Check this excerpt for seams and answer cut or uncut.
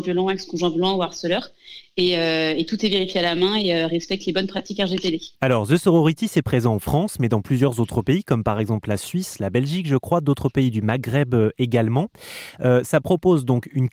cut